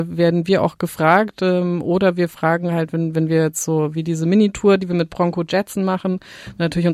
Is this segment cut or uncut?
uncut